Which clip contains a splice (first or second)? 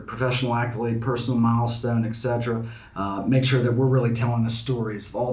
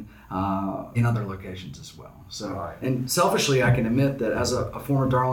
second